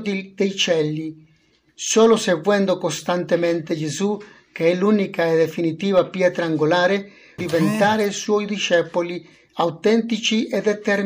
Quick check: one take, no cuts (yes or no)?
no